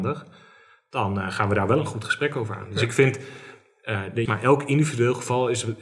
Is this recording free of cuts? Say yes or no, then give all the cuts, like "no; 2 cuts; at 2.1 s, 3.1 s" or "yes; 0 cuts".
no; 1 cut; at 4.3 s